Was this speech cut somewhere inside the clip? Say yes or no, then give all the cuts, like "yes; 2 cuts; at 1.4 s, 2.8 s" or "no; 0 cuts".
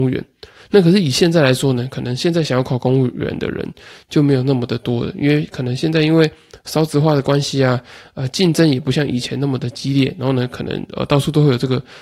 no; 0 cuts